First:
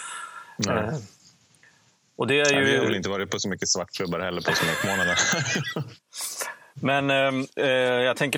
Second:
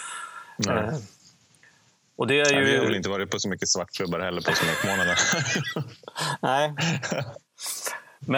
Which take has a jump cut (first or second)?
first